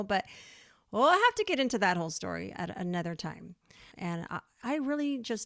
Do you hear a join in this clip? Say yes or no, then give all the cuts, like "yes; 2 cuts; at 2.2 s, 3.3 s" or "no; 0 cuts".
yes; 1 cut; at 3.9 s